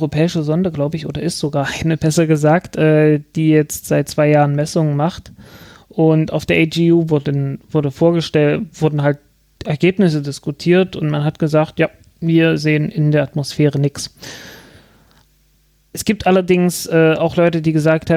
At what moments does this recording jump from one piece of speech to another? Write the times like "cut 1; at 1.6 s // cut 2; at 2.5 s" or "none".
none